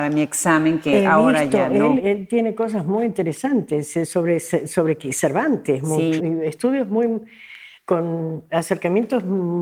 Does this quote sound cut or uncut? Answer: cut